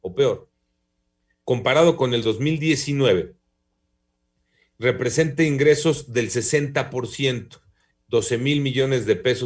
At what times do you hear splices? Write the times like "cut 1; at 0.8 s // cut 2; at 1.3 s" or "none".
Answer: cut 1; at 7.9 s

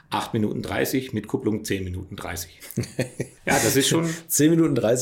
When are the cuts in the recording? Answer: cut 1; at 3.4 s

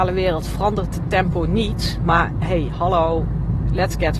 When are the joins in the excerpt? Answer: none

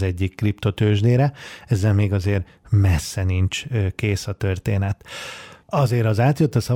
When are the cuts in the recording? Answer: cut 1; at 5.6 s

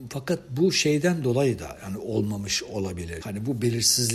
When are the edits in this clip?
cut 1; at 3.2 s

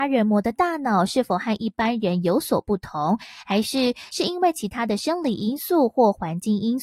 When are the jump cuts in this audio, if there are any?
none

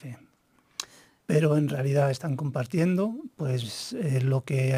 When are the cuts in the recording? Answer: cut 1; at 1.2 s

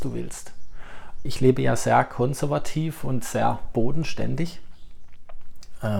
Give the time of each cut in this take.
cut 1; at 1.3 s

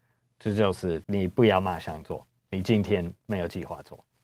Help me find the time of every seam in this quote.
cut 1; at 1.0 s

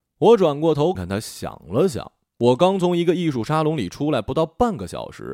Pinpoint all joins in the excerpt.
cut 1; at 1.0 s

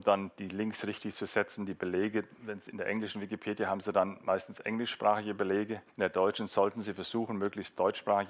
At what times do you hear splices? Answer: cut 1; at 5.9 s

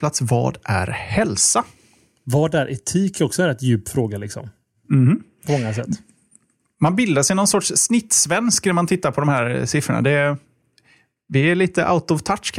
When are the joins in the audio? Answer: none

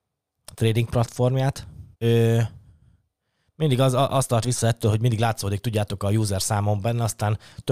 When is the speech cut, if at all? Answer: cut 1; at 1.9 s

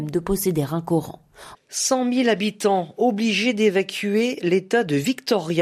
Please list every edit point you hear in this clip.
cut 1; at 1.6 s

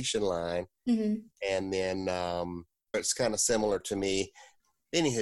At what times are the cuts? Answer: cut 1; at 2.9 s

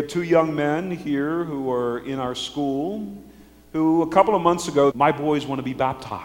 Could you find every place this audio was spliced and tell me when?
cut 1; at 4.9 s

